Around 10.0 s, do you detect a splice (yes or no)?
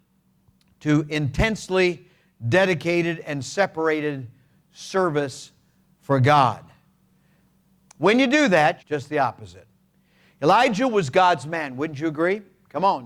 no